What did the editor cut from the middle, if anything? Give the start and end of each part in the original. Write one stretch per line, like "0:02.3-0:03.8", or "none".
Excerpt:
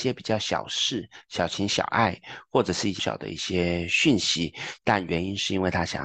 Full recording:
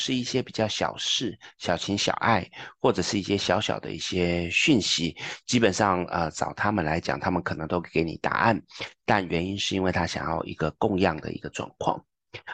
0:03.3-0:03.6
0:05.4-0:09.0